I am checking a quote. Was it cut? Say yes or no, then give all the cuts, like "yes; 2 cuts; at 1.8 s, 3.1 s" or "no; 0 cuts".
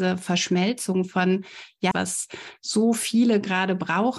yes; 1 cut; at 1.9 s